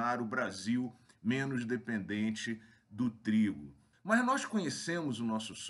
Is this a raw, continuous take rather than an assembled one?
no; 1 cut; at 3.9 s

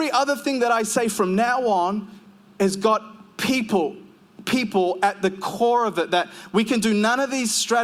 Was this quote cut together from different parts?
no; 0 cuts

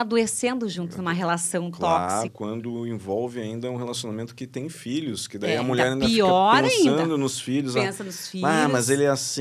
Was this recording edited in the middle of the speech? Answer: yes; 1 cut; at 2.3 s

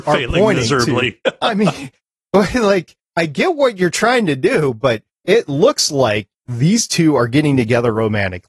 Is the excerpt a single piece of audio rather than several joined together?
yes; 0 cuts

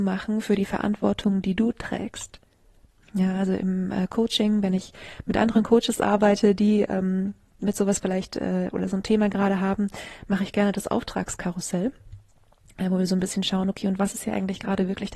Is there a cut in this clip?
no; 0 cuts

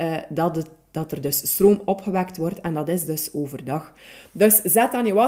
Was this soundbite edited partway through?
no; 0 cuts

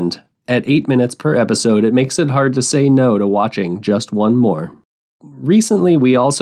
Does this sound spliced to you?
no; 0 cuts

